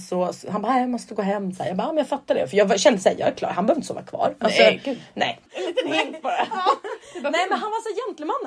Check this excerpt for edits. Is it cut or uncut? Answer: cut